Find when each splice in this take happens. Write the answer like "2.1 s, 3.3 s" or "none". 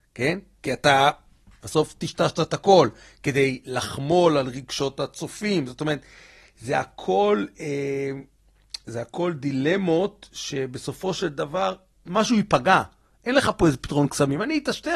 none